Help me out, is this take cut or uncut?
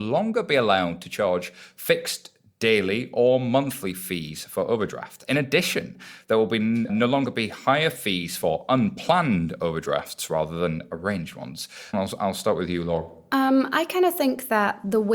cut